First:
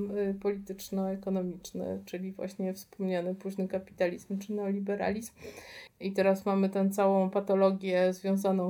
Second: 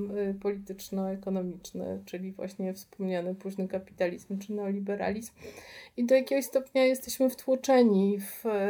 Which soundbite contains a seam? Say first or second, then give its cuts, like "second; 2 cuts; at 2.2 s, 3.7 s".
first; 1 cut; at 5.9 s